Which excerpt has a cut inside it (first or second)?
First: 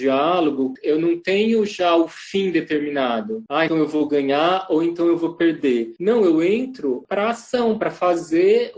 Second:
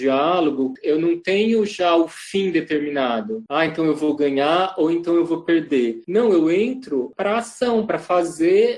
first